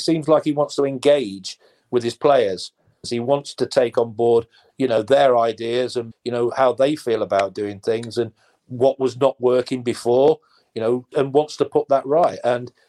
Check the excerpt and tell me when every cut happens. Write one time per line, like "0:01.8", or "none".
0:03.0
0:06.1
0:11.1